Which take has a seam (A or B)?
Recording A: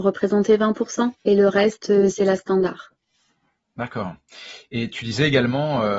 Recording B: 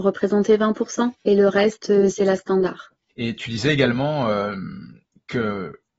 B